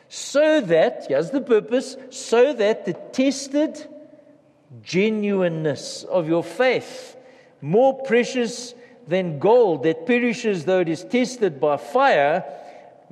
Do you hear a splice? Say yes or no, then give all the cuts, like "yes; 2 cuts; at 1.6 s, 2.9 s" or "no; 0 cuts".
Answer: no; 0 cuts